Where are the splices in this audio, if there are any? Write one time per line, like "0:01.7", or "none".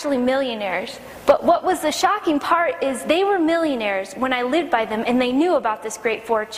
none